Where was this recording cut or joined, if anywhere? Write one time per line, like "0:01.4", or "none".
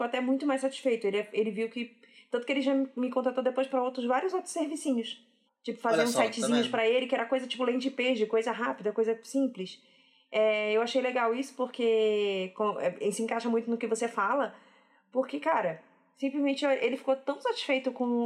0:05.5